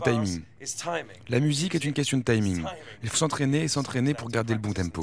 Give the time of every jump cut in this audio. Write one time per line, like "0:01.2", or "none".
0:03.1